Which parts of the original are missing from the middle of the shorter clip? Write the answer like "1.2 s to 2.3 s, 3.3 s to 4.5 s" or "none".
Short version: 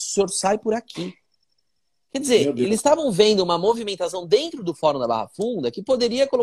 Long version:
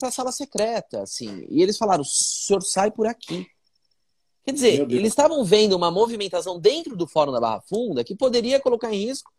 none